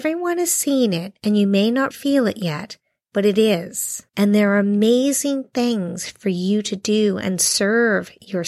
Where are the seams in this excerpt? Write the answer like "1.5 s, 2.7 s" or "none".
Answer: 1.9 s, 4.1 s